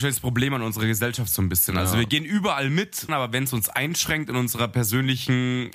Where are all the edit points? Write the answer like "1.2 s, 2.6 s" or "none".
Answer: 3.1 s